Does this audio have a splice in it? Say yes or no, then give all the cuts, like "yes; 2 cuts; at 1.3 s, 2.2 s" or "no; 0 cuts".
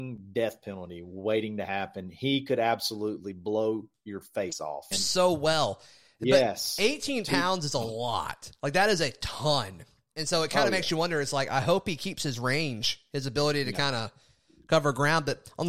yes; 1 cut; at 4.9 s